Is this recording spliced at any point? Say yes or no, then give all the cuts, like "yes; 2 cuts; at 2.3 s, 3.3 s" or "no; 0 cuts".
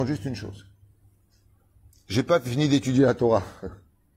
no; 0 cuts